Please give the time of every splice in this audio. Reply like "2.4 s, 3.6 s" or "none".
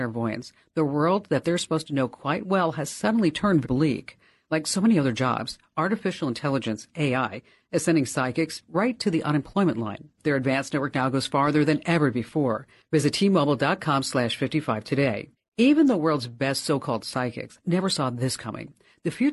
3.6 s, 10.2 s